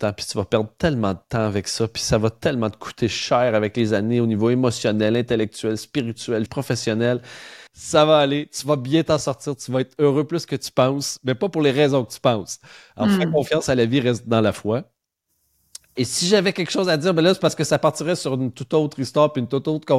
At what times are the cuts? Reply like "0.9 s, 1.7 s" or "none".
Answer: 6.5 s, 7.7 s

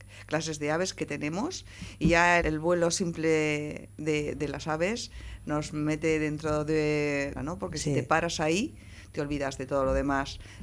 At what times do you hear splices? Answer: 2.4 s, 7.4 s

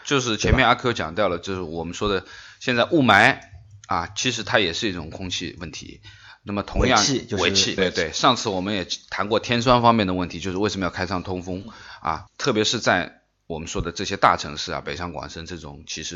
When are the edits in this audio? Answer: 7.8 s, 12.3 s

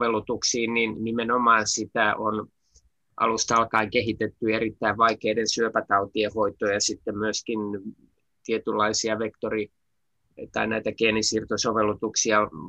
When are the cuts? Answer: none

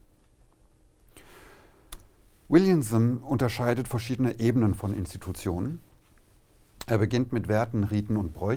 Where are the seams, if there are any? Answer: none

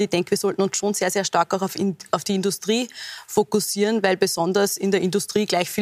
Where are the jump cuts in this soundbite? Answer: none

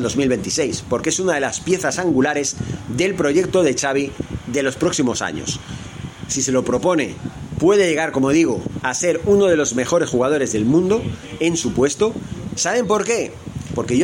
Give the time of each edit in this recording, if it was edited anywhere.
6.3 s, 8.8 s, 12.5 s

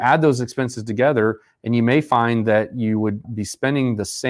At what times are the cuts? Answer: 3.2 s

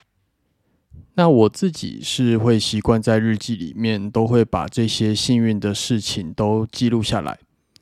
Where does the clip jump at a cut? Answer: none

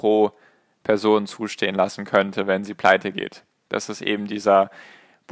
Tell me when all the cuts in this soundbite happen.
none

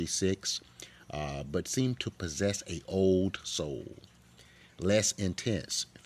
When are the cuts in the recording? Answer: 4.6 s

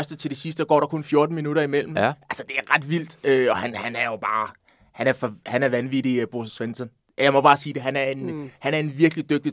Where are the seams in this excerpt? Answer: none

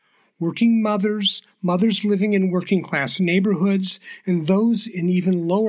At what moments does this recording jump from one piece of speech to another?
none

